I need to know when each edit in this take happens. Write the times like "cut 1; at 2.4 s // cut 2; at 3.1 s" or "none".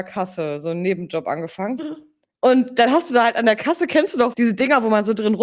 cut 1; at 1.8 s // cut 2; at 4.3 s